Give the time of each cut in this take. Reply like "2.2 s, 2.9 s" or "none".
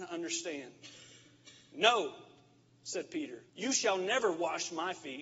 3.5 s